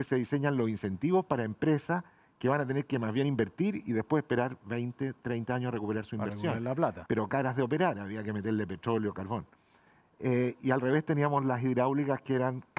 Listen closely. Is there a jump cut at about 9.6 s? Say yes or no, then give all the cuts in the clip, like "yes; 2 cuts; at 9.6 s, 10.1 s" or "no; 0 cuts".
no; 1 cut; at 7.1 s